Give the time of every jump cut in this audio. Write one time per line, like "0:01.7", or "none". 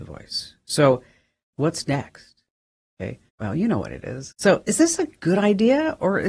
0:01.5
0:03.3
0:04.3

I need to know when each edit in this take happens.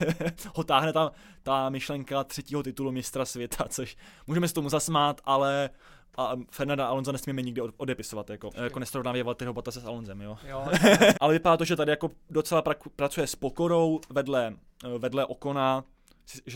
0:08.5
0:11.1

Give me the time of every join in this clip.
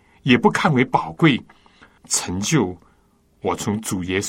0:02.0

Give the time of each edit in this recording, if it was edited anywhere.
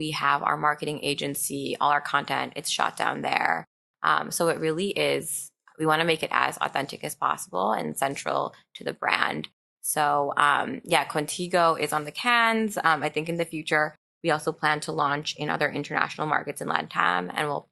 none

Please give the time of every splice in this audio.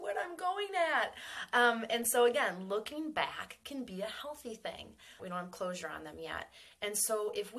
0:05.2

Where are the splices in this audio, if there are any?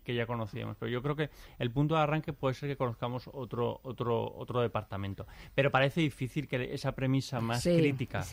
none

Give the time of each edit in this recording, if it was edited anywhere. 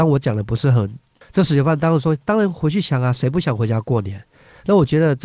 0:01.2

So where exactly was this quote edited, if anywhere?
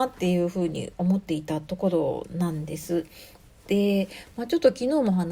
none

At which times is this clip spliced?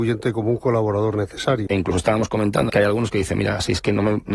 0:01.7
0:02.7

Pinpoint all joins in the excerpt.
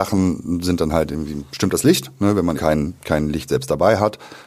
0:02.6

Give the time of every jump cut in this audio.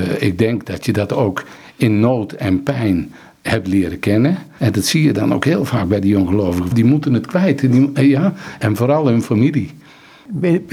0:04.6
0:06.7

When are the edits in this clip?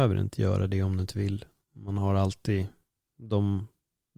none

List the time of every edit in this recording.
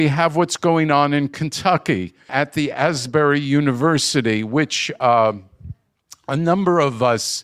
0:02.3

